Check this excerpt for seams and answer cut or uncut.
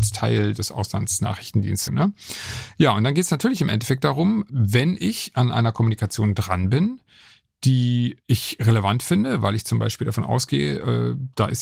cut